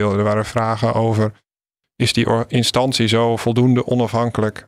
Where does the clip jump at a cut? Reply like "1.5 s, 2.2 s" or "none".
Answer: none